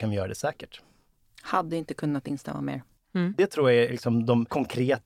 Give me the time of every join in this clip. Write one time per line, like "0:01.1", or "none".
0:03.0